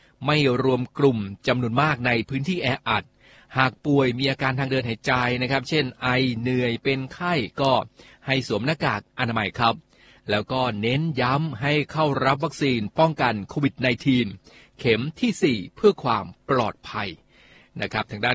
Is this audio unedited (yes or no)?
yes